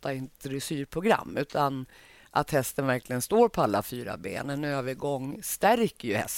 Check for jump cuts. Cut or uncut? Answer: uncut